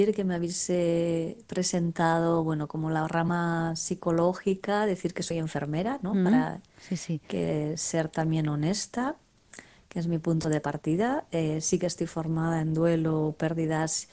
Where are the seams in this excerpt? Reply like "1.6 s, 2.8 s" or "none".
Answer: none